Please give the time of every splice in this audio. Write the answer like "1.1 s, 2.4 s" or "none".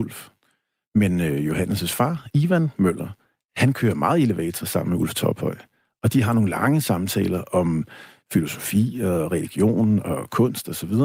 none